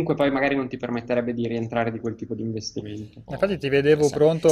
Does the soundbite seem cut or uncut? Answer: cut